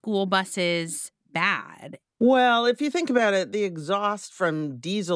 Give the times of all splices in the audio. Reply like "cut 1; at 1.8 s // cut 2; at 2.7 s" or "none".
cut 1; at 2.0 s

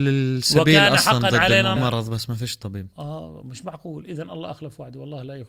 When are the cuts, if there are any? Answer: cut 1; at 1.8 s

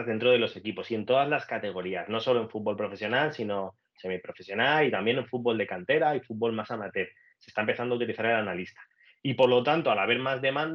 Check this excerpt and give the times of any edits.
none

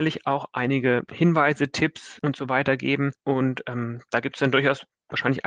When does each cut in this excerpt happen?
none

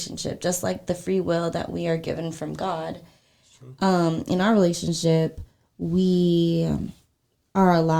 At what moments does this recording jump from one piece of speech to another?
none

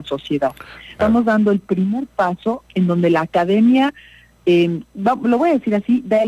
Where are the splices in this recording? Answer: cut 1; at 1.0 s

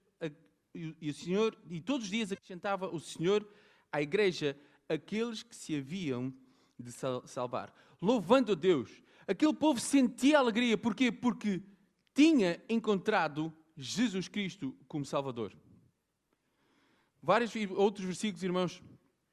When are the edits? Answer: none

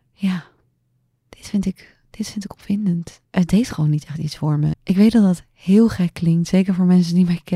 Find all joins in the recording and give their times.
cut 1; at 3.2 s // cut 2; at 4.7 s

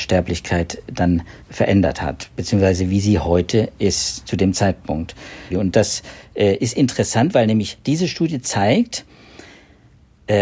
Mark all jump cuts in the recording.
cut 1; at 1.4 s // cut 2; at 5.5 s

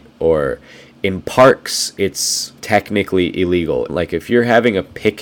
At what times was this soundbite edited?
cut 1; at 2.6 s // cut 2; at 3.9 s

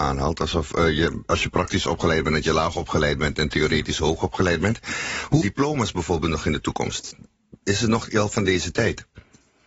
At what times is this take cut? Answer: cut 1; at 5.4 s

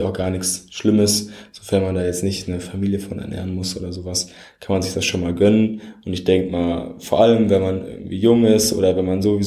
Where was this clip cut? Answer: none

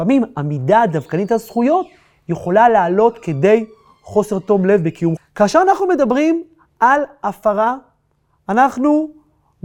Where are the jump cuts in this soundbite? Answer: cut 1; at 5.2 s

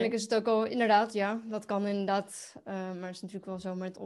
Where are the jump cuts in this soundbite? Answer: none

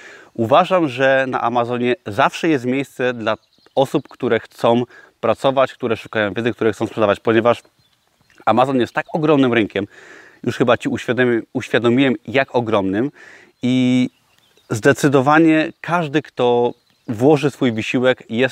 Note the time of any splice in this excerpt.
none

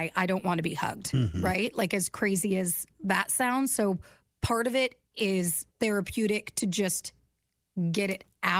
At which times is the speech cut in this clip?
cut 1; at 5.7 s

